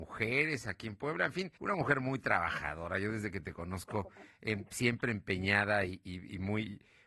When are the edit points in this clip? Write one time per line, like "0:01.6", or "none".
0:01.6